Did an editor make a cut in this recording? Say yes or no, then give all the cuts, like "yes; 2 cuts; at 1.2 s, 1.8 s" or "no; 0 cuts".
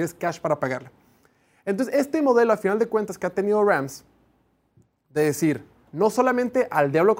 no; 0 cuts